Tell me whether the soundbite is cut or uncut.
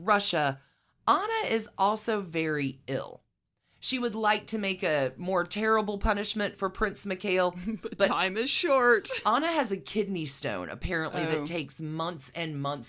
uncut